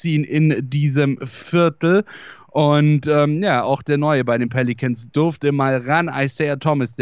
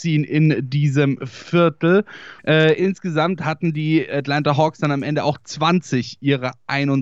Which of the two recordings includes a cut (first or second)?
second